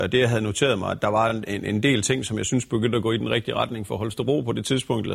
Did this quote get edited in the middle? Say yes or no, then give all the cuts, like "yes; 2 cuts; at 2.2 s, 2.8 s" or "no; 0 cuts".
no; 0 cuts